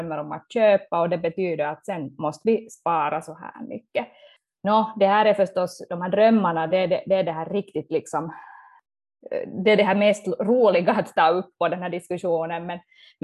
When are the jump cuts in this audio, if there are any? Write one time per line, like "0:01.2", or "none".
none